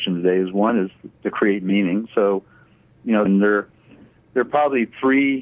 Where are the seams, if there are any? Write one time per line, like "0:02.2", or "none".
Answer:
0:02.1
0:03.3